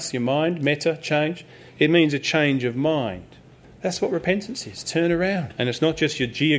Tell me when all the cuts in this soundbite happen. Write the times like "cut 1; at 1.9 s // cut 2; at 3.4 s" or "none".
cut 1; at 3.6 s // cut 2; at 5.5 s